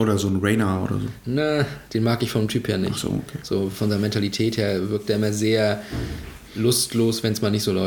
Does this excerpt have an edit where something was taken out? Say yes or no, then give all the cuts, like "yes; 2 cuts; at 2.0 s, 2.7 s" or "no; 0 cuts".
no; 0 cuts